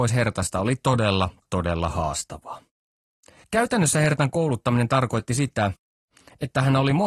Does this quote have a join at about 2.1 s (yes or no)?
no